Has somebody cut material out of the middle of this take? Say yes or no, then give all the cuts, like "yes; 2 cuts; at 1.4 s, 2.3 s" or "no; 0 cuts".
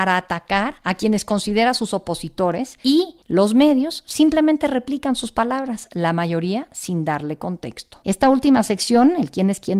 yes; 1 cut; at 8.0 s